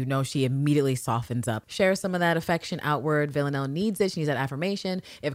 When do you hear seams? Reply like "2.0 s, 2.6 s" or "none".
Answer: 1.6 s